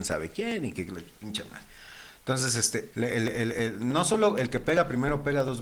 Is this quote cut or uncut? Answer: cut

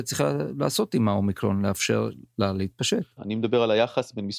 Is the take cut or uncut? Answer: cut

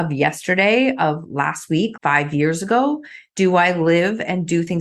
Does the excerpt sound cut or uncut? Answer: cut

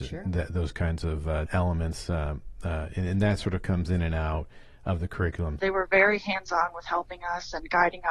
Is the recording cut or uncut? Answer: cut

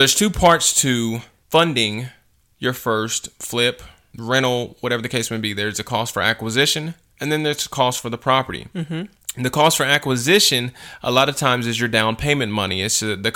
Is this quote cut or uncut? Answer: uncut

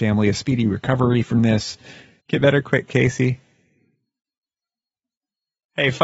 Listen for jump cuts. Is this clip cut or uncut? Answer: uncut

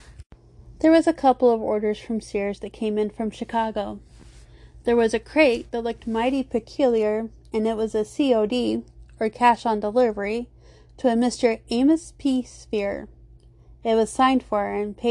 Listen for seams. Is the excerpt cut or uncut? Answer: uncut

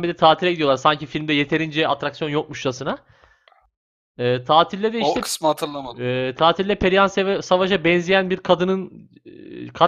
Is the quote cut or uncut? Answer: uncut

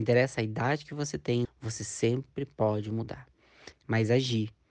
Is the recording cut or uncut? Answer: cut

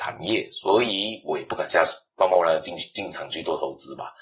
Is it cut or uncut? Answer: uncut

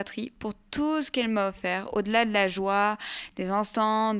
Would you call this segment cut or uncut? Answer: uncut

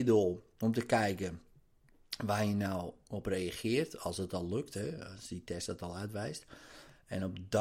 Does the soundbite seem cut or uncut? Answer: uncut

